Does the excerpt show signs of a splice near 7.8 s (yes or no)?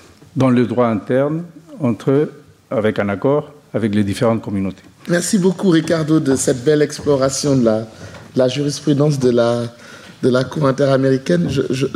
no